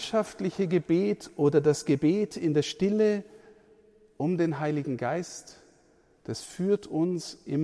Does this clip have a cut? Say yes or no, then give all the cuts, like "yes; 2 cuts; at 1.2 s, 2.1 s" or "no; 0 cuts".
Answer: no; 0 cuts